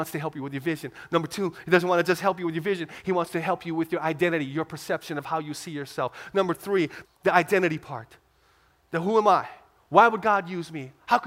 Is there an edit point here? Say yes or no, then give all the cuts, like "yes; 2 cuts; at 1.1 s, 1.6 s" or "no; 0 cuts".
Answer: yes; 1 cut; at 7.0 s